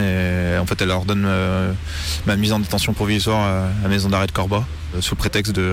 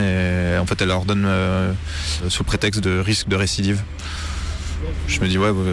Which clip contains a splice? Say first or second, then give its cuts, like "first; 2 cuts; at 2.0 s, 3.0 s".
second; 1 cut; at 2.2 s